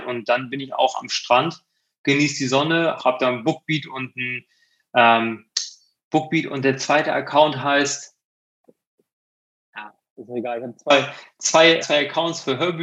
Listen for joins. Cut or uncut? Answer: cut